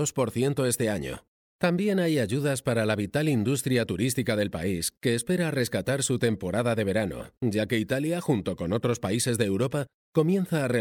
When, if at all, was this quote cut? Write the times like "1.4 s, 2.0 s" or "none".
1.4 s